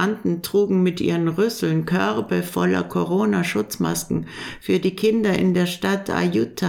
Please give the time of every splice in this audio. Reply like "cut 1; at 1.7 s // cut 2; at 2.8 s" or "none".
none